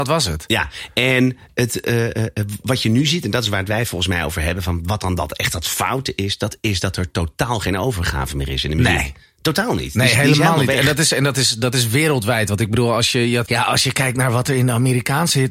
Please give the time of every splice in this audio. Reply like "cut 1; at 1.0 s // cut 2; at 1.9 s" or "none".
cut 1; at 13.5 s